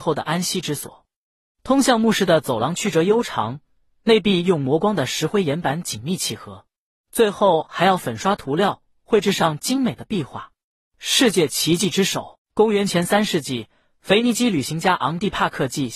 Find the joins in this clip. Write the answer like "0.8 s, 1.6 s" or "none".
10.8 s